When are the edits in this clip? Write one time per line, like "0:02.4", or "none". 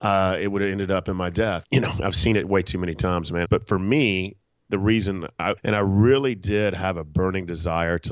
0:01.6
0:03.4
0:05.6

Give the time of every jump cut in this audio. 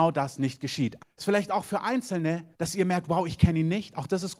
0:01.0
0:02.5

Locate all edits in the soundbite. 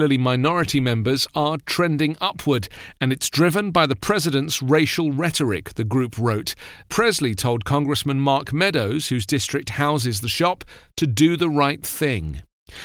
0:06.8

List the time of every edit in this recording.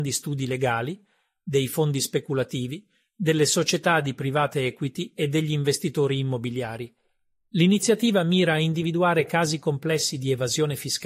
none

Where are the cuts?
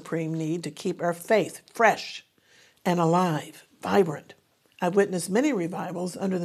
0:04.6

